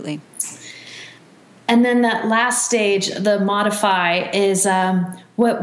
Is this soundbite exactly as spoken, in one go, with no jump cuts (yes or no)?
yes